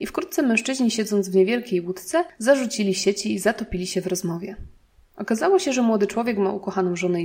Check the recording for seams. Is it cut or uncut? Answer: uncut